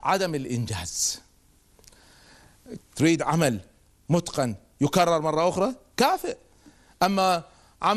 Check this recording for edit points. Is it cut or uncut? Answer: cut